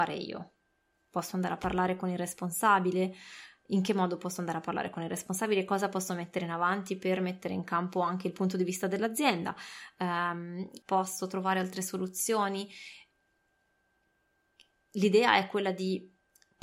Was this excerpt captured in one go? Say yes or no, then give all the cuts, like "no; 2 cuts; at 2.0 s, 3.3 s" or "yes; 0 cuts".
no; 1 cut; at 10.8 s